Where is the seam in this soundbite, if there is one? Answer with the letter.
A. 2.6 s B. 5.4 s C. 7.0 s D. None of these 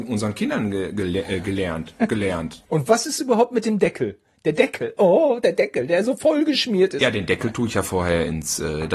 A